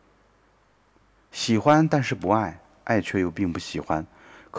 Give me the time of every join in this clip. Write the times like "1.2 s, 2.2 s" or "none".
none